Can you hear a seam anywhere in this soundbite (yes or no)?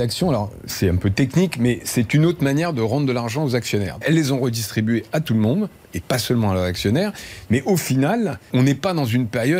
yes